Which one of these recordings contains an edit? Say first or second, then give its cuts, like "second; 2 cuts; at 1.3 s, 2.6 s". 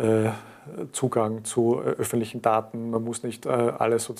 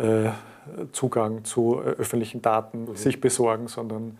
second; 1 cut; at 2.8 s